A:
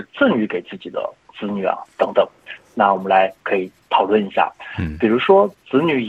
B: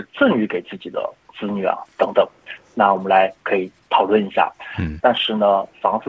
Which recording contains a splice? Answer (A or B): B